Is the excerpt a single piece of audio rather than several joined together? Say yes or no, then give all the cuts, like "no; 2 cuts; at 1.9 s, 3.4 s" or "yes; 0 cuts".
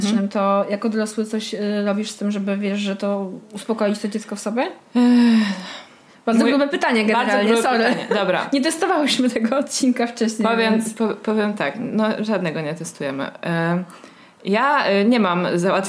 yes; 0 cuts